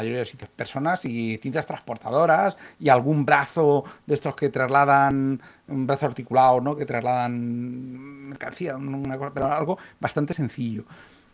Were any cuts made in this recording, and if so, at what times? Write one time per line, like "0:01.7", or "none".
none